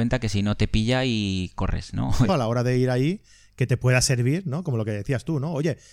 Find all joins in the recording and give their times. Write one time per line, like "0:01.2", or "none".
0:02.3